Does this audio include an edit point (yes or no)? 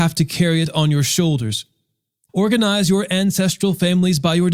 yes